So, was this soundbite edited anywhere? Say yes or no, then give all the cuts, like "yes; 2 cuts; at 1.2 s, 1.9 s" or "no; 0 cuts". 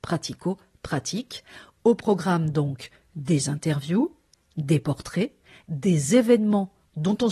no; 0 cuts